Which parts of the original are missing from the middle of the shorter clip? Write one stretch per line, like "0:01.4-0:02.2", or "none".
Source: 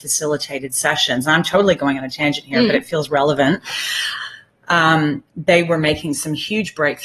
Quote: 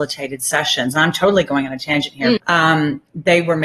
0:02.7-0:04.6